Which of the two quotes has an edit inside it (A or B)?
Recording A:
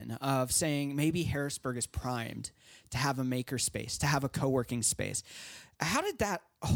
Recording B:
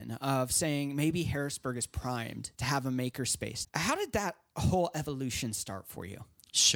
B